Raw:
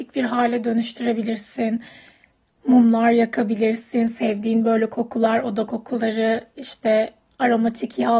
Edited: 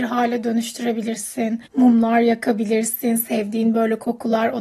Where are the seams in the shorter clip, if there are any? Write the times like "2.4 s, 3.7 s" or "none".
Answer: 1.7 s